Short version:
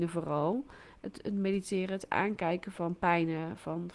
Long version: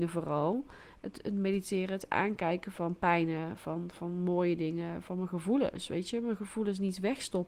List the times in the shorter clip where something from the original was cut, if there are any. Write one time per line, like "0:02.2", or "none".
none